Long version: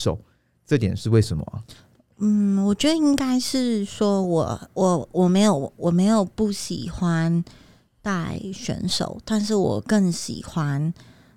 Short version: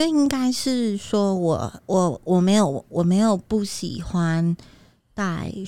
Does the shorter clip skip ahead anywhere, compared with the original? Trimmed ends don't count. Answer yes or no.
no